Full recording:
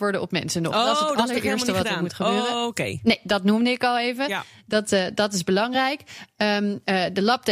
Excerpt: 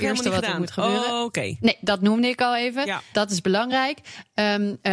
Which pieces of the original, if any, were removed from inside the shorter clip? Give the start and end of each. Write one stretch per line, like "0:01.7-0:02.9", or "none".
0:04.6-0:05.2